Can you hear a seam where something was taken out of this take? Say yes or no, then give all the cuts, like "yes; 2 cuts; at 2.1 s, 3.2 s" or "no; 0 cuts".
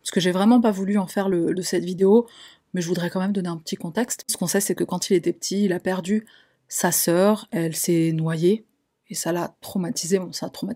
yes; 2 cuts; at 1.5 s, 4.3 s